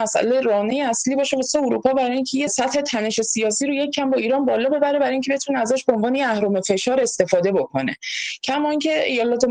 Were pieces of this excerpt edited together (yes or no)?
yes